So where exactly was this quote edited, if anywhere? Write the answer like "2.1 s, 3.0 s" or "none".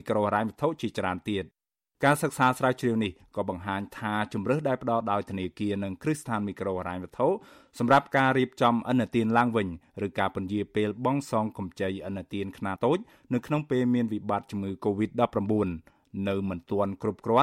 12.8 s